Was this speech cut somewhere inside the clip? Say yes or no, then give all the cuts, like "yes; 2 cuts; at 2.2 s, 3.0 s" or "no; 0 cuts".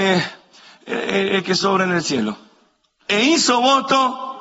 yes; 1 cut; at 3.1 s